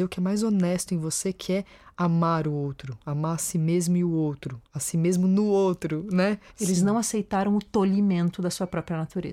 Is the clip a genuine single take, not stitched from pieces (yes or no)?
no